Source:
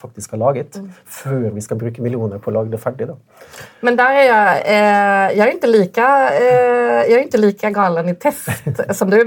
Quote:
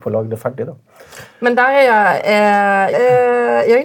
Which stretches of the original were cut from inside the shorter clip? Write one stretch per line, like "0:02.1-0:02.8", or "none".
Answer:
0:05.3-0:06.3